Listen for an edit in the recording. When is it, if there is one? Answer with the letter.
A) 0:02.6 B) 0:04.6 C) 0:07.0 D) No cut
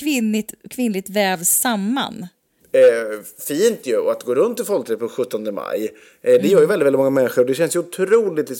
A